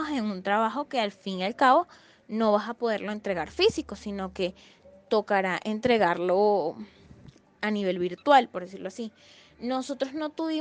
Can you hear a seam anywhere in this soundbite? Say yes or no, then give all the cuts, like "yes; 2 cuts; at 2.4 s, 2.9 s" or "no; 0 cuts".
no; 0 cuts